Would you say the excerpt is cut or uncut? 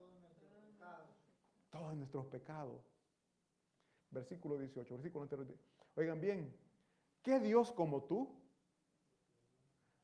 cut